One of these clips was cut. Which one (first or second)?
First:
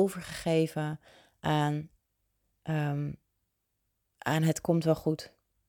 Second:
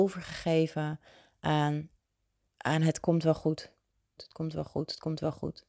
second